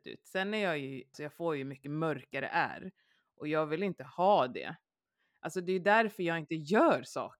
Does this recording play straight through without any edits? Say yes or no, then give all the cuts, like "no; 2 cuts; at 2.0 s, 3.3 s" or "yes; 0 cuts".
no; 1 cut; at 1.1 s